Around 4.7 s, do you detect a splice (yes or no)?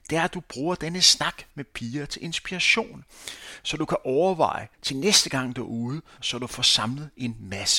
yes